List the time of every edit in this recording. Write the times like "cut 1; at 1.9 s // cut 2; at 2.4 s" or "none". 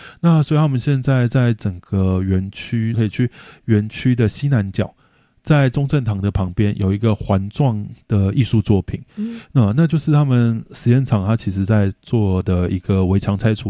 cut 1; at 2.9 s